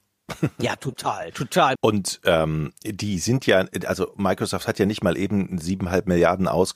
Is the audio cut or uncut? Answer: cut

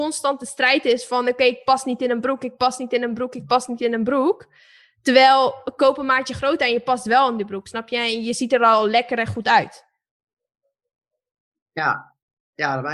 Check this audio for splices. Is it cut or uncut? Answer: uncut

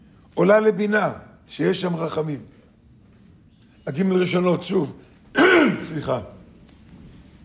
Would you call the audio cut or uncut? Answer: cut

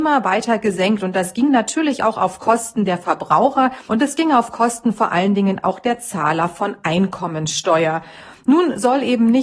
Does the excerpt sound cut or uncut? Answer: cut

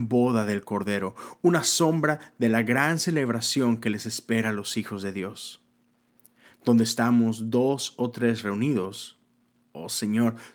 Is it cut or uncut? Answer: uncut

